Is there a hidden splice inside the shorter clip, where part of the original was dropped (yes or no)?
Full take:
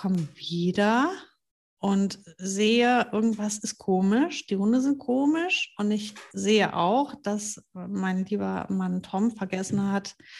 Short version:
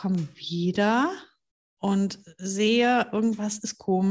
no